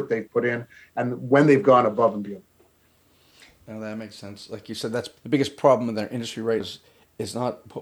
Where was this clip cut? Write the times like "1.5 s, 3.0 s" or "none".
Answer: 5.2 s, 6.6 s